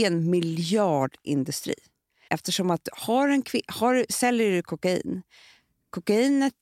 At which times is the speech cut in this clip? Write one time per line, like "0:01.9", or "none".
0:02.3